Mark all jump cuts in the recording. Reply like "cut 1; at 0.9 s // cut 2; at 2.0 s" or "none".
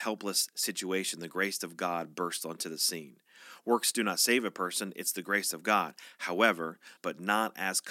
cut 1; at 7.0 s